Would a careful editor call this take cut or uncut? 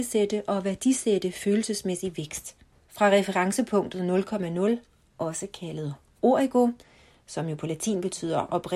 cut